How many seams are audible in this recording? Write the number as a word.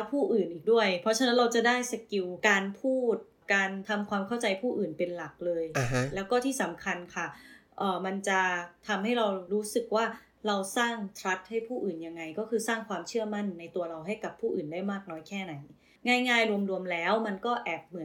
zero